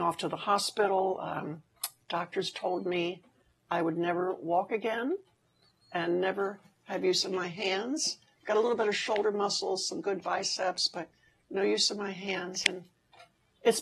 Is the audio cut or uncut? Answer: uncut